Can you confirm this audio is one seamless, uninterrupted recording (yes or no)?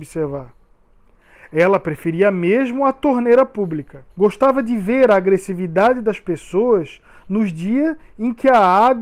no